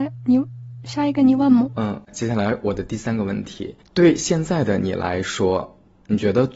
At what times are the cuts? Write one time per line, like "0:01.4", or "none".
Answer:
none